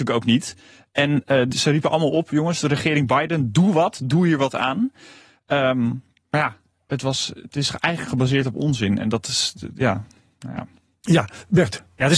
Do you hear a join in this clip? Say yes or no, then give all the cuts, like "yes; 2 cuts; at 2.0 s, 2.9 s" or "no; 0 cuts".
no; 0 cuts